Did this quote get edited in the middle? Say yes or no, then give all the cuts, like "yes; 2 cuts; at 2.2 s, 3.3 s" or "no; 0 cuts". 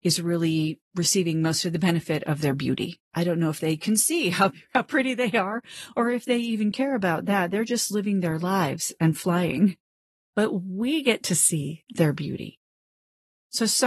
no; 0 cuts